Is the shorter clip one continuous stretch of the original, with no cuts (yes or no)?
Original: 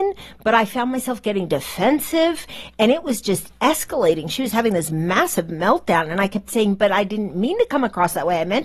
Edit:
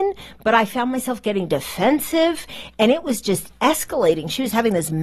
yes